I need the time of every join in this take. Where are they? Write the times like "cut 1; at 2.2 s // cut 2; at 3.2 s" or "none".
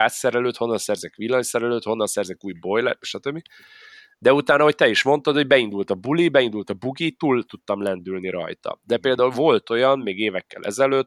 none